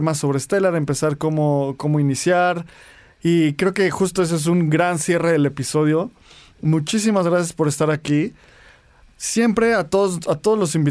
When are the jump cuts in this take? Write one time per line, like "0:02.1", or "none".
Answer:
none

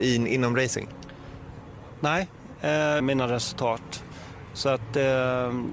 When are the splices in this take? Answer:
0:03.0

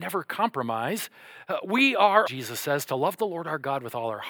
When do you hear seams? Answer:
0:02.3

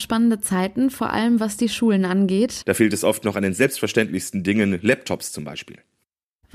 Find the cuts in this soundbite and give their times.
0:02.6

